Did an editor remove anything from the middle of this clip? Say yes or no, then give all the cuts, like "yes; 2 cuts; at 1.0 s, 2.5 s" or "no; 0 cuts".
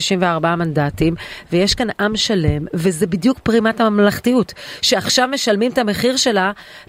no; 0 cuts